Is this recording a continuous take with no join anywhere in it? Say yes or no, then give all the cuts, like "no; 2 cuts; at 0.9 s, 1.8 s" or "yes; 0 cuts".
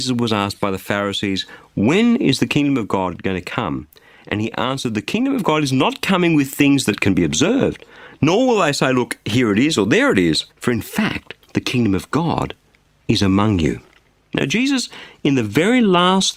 no; 1 cut; at 10.5 s